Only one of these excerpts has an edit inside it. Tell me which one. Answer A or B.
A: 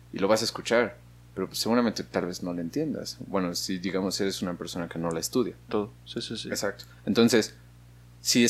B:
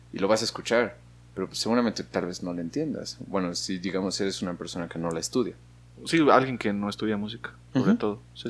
A